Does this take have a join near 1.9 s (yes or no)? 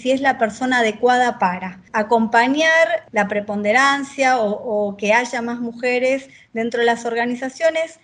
yes